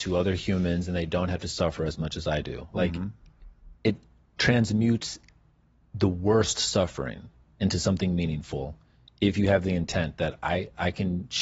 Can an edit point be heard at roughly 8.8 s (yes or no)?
no